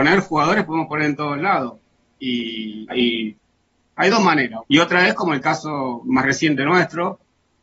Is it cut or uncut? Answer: cut